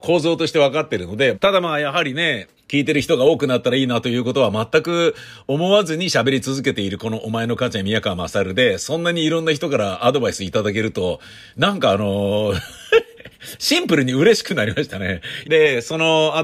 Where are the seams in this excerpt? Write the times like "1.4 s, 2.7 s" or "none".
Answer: 1.3 s, 2.6 s, 15.4 s